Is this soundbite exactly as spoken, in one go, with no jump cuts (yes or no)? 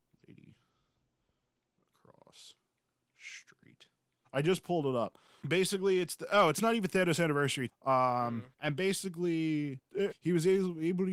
no